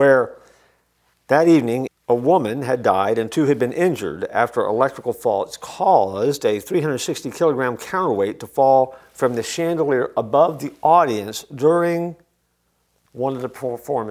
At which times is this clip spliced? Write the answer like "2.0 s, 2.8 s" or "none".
1.9 s